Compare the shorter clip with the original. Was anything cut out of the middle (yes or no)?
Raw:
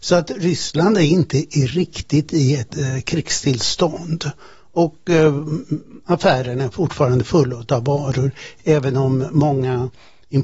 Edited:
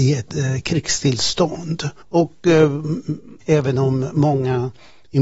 yes